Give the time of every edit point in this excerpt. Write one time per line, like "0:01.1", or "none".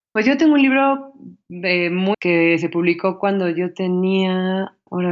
0:02.1

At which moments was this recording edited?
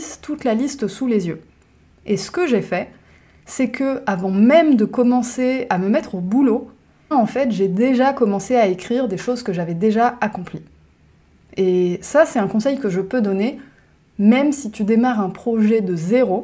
0:07.1

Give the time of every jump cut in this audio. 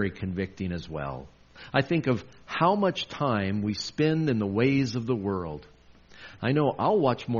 0:06.4

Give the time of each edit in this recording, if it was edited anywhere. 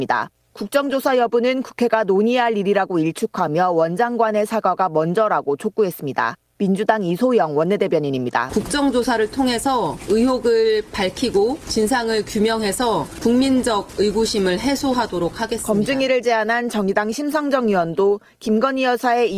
0:08.5

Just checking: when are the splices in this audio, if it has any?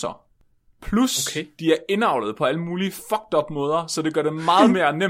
none

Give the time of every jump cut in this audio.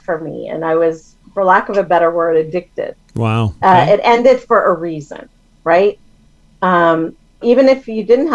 0:03.6
0:07.4

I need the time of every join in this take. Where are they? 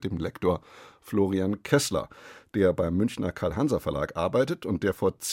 none

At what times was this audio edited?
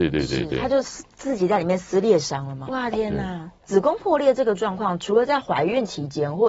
0:02.7

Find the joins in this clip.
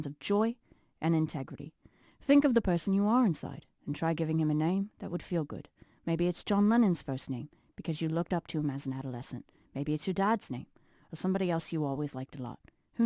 none

